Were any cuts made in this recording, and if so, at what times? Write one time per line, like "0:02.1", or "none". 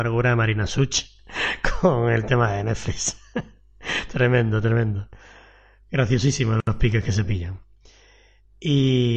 none

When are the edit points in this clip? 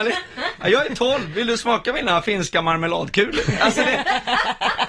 none

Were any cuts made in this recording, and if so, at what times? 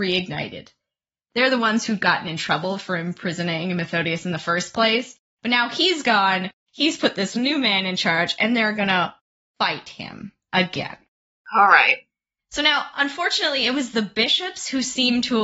none

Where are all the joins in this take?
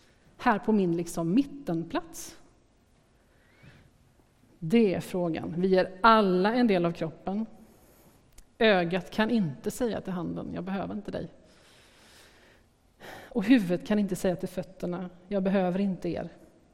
none

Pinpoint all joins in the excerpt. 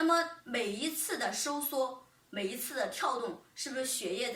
none

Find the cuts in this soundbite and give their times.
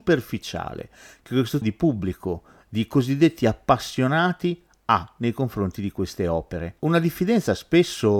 0:01.6
0:06.8

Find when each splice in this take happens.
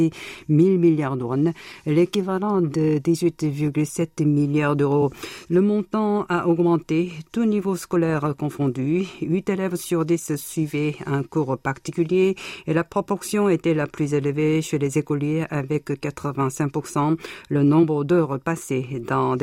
0:05.5

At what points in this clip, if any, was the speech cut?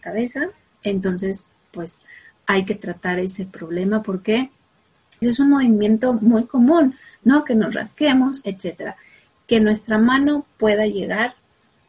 0:05.2
0:08.4

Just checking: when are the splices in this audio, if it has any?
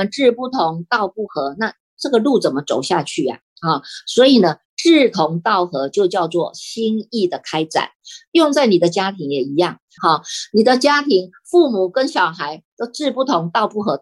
0:10.0

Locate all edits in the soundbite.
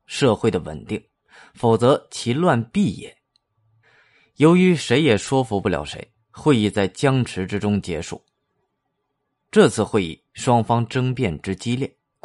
none

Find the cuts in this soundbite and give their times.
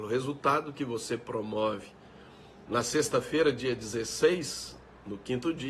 0:02.7

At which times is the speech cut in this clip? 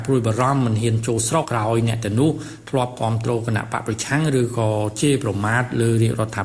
0:01.4

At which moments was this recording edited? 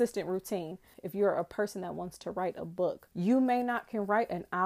0:00.9
0:03.1

